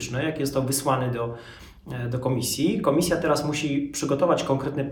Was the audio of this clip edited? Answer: no; 0 cuts

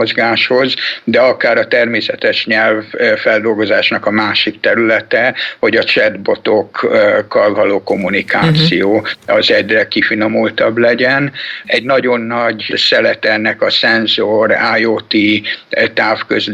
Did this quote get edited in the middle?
yes; 1 cut; at 11.6 s

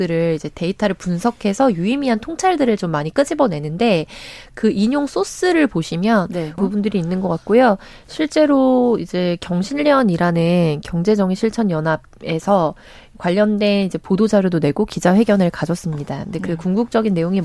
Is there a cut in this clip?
yes; 1 cut; at 6.6 s

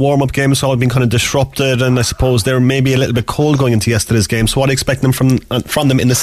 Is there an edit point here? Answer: no; 0 cuts

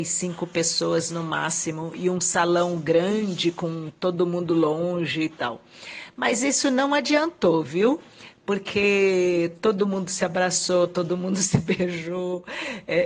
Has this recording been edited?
no; 0 cuts

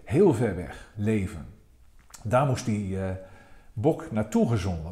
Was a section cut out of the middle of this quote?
yes; 1 cut; at 0.9 s

